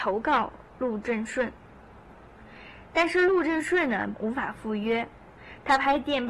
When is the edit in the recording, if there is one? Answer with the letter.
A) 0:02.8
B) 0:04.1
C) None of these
B